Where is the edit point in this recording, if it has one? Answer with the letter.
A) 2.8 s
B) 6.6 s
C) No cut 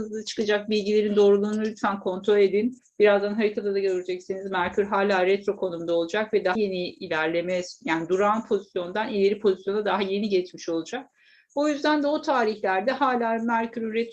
B